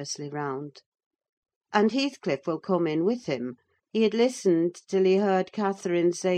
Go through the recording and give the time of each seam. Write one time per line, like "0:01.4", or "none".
0:01.7
0:03.8

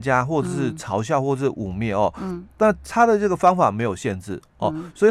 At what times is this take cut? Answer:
none

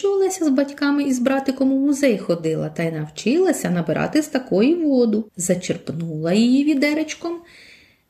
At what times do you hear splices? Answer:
0:05.3

